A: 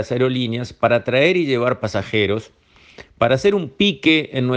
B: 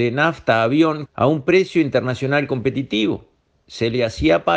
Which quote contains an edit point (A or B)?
B